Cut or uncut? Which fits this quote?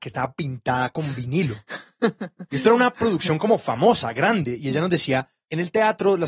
uncut